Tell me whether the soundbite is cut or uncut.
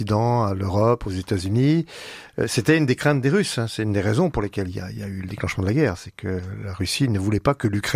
uncut